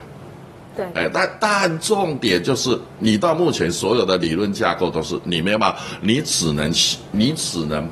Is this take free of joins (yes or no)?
yes